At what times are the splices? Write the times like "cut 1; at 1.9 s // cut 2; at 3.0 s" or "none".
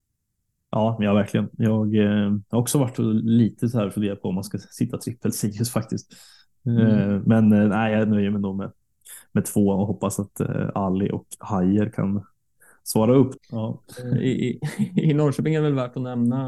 cut 1; at 13.4 s